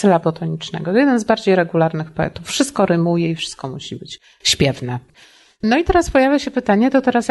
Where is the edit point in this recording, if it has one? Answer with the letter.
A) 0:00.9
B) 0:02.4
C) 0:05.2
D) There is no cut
D